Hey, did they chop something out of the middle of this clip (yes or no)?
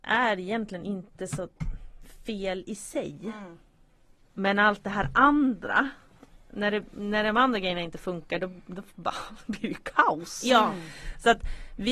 no